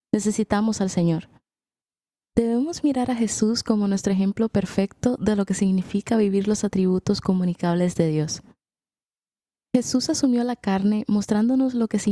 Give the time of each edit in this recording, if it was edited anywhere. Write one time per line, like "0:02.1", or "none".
none